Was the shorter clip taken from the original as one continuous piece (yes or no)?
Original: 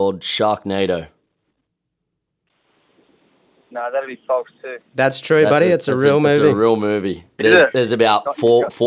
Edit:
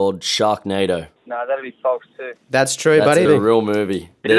no